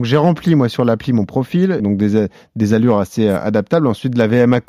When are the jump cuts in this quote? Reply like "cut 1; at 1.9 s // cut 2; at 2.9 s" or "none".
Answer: cut 1; at 1.8 s